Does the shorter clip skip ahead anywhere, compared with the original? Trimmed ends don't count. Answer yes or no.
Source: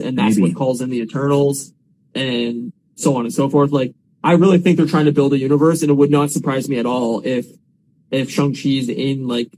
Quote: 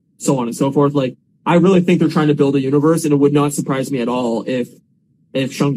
no